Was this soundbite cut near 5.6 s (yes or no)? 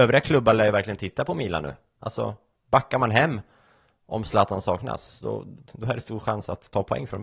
yes